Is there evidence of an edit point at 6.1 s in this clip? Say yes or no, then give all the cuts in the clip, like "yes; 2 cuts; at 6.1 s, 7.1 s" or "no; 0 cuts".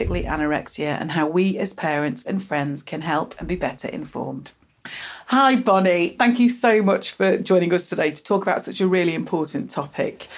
no; 1 cut; at 2.2 s